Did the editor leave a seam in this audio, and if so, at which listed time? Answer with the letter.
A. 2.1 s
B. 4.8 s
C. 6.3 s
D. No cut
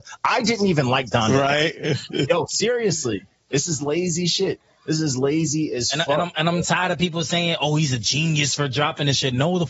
A